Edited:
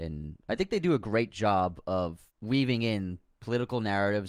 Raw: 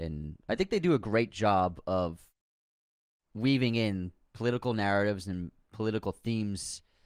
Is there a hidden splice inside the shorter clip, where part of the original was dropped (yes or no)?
yes